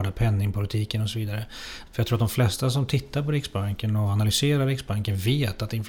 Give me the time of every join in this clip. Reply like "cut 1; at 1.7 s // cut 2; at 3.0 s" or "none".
cut 1; at 1.9 s